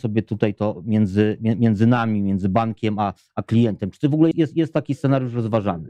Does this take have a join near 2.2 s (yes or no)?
no